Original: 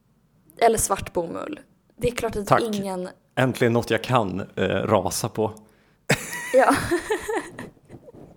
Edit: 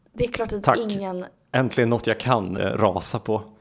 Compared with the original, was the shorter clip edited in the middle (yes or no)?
yes